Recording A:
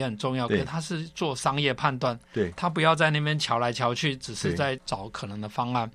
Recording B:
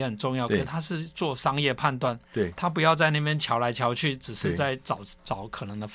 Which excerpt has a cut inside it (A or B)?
A